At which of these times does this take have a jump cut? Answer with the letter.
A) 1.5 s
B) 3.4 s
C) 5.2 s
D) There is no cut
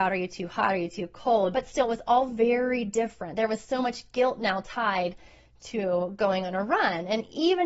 A